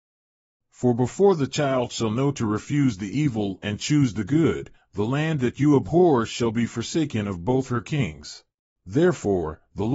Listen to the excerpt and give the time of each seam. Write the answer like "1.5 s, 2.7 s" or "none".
8.7 s